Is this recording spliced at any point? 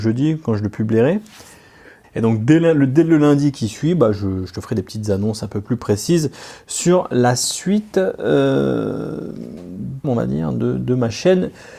yes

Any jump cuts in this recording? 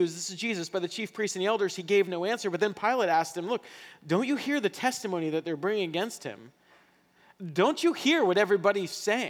no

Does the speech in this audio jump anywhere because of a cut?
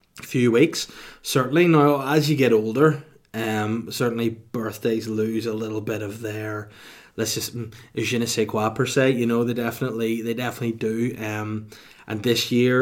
no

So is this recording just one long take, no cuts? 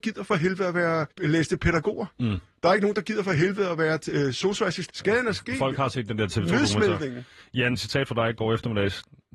no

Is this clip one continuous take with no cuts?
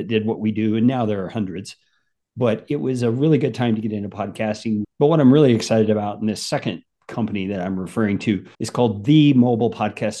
no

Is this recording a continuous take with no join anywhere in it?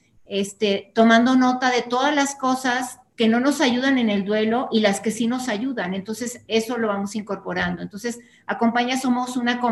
no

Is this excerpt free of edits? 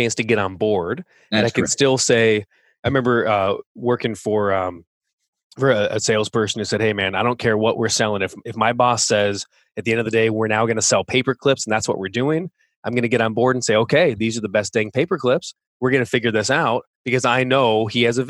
yes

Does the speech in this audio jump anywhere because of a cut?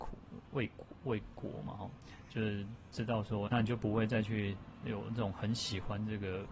yes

